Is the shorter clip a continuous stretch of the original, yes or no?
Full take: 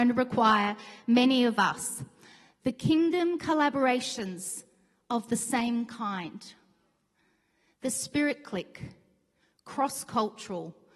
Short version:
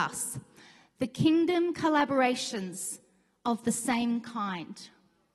yes